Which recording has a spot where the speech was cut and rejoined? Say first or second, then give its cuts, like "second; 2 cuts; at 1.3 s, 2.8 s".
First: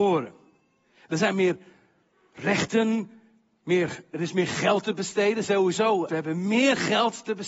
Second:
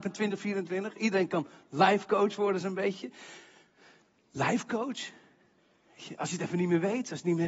first; 1 cut; at 6.1 s